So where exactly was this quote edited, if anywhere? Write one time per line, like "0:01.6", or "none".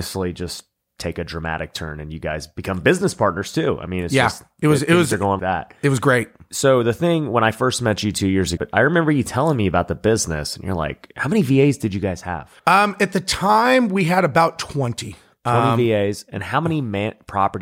0:05.4
0:08.6
0:12.6

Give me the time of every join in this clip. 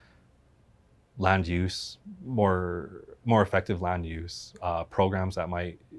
0:03.2

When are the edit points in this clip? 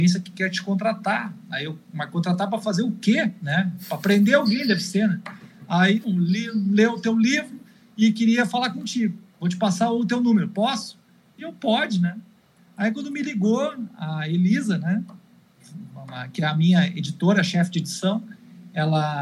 0:06.0

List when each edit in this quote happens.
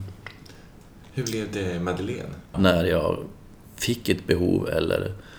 0:02.5

